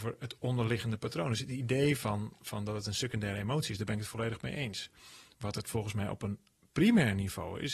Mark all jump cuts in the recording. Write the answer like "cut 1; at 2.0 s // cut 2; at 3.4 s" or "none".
none